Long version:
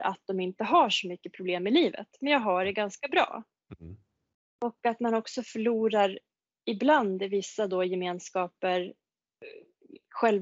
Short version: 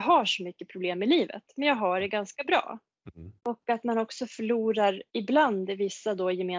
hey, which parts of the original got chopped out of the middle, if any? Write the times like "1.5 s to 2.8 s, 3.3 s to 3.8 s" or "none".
4.0 s to 4.5 s, 6.2 s to 6.6 s